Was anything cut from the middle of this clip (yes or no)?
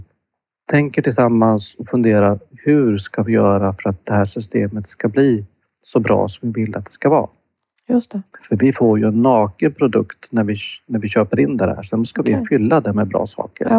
no